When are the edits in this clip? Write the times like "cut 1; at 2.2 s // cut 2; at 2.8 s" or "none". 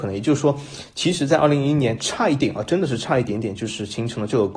cut 1; at 2.4 s